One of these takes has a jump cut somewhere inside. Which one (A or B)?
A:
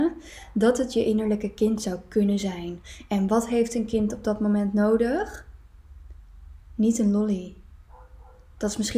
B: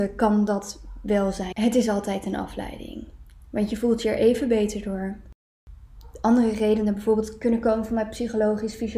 B